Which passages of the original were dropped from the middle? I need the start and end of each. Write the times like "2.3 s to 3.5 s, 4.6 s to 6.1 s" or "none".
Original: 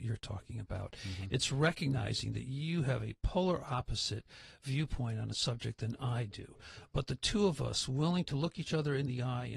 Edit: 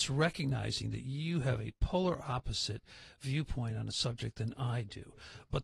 none

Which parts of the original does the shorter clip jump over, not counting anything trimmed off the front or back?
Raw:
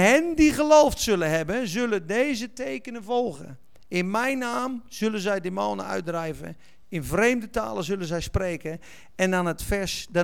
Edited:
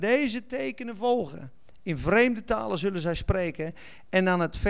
3.9 s to 6.9 s

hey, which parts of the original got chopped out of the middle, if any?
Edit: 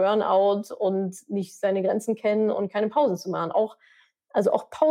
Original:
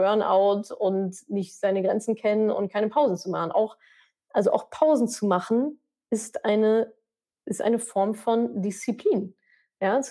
none

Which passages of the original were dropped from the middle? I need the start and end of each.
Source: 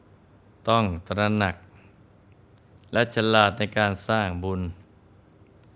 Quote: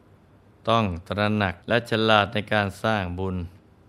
1.6 s to 2.9 s

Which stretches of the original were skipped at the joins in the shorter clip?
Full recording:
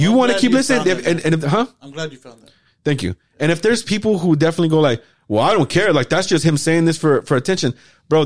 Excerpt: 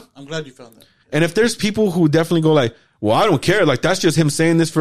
2.7 s to 3.3 s

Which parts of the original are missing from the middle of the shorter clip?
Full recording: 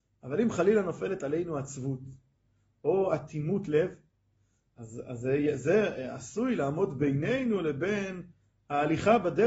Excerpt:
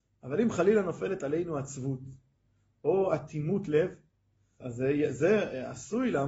4.6 s to 5.0 s

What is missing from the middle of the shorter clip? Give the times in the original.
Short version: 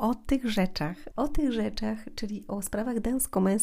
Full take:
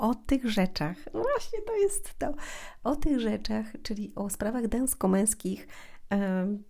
1.1 s to 2.8 s

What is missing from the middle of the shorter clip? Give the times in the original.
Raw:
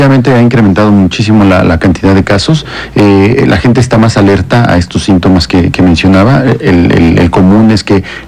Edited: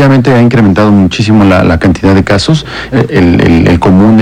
2.9 s to 6.4 s

